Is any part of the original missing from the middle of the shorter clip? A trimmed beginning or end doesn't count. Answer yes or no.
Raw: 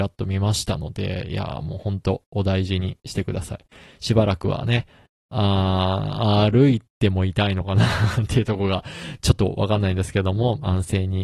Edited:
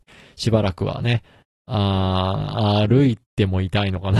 no